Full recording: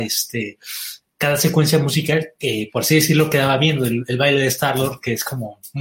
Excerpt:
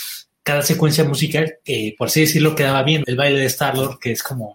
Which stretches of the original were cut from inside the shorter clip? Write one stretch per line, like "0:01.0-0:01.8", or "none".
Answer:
0:03.8-0:04.1